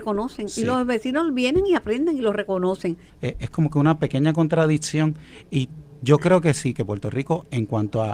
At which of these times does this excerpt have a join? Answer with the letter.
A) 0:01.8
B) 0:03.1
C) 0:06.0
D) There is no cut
B